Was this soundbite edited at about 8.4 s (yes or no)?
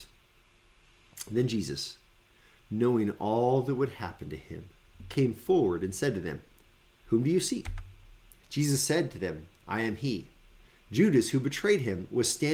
yes